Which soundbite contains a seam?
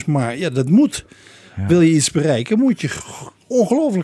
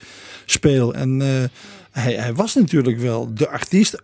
second; 1 cut; at 0.9 s

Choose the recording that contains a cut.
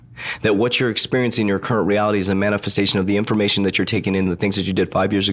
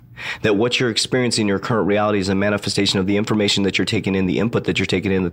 first; 1 cut; at 4.3 s

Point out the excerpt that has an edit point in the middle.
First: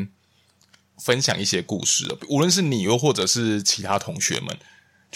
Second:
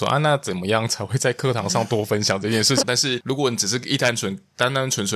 second; 1 cut; at 2.8 s

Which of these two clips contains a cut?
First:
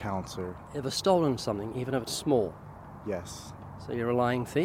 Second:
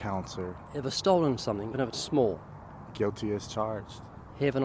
second; 2 cuts; at 1.7 s, 2.9 s

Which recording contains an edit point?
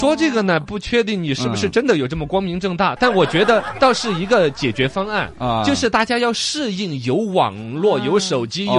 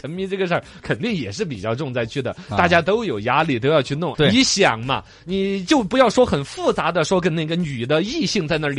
second; 1 cut; at 4.1 s

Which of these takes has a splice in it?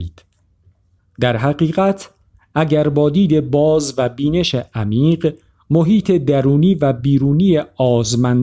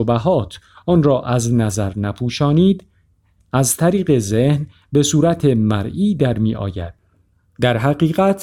first; 1 cut; at 1.0 s

